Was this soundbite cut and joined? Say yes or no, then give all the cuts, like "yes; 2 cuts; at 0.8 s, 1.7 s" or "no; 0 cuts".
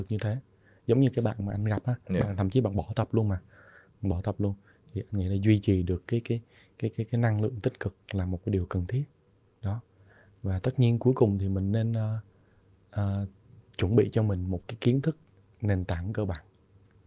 no; 0 cuts